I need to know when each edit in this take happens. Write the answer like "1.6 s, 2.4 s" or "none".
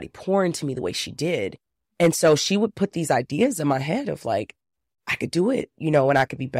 none